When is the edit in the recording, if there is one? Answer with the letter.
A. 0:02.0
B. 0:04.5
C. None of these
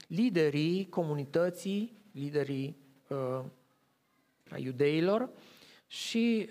B